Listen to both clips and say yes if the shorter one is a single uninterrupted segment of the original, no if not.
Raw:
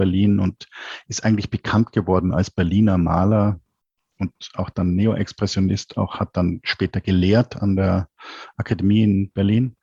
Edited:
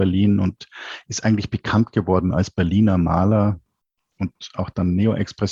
yes